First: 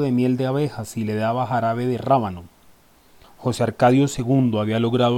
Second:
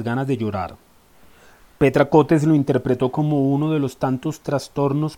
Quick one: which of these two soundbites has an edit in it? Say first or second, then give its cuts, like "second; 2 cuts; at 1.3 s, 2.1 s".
first; 1 cut; at 3.2 s